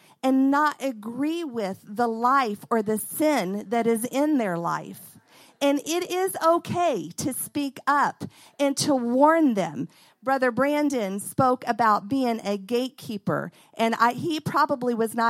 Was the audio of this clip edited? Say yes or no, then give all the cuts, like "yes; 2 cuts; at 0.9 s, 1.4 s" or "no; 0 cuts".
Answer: no; 0 cuts